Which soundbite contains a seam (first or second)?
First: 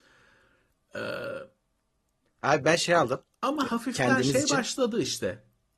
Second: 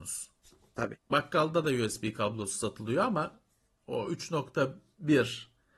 first